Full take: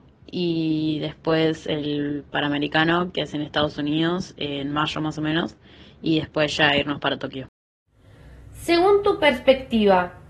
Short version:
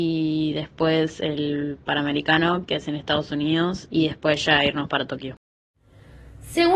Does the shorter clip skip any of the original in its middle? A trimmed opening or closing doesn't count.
yes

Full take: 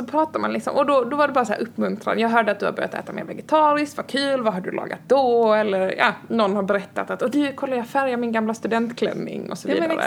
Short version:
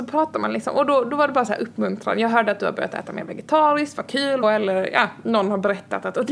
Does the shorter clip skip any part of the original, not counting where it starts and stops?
yes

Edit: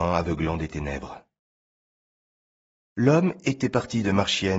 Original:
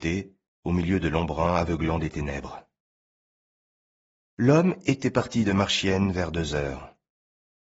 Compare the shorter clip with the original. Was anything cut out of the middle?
no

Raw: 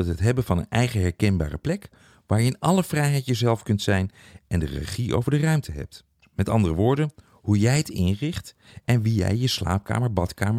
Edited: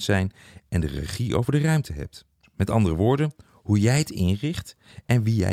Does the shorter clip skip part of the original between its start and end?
no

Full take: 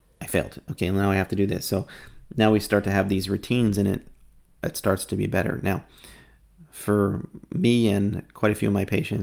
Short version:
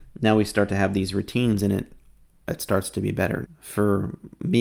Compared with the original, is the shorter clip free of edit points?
no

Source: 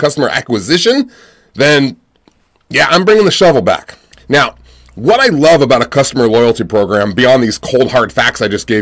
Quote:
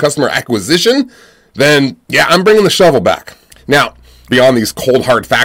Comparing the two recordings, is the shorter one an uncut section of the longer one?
no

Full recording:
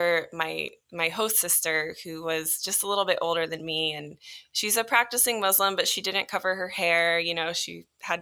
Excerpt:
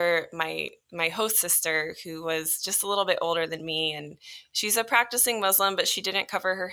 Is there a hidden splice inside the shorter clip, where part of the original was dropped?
no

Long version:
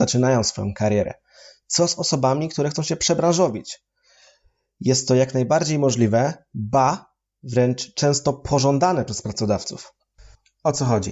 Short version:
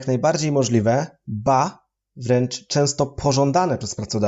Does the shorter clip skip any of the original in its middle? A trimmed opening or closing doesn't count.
no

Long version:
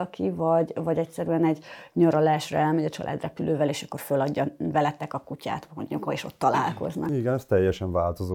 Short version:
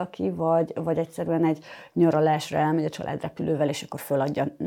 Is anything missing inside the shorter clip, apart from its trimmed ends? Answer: no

